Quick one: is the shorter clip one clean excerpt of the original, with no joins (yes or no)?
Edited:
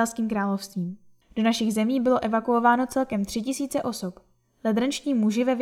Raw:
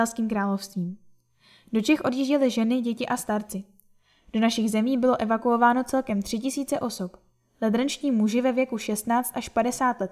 no